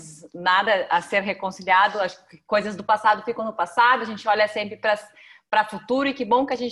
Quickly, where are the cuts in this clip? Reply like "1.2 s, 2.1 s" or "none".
none